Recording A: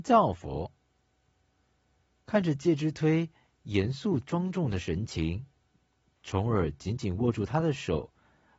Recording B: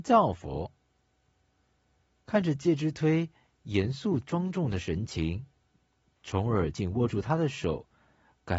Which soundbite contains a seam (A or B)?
B